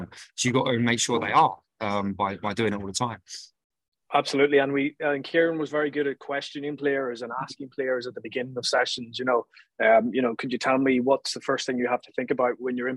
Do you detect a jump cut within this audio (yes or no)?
no